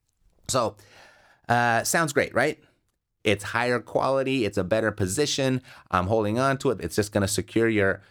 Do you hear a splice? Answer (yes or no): yes